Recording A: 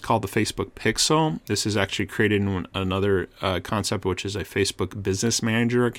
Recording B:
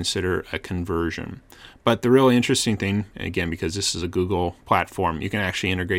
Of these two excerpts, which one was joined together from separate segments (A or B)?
B